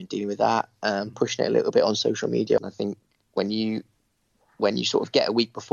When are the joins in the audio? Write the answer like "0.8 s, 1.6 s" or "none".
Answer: 2.6 s